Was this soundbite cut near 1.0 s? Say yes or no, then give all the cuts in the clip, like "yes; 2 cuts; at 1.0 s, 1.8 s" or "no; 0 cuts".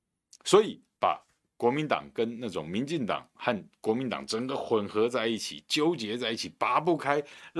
yes; 1 cut; at 1.0 s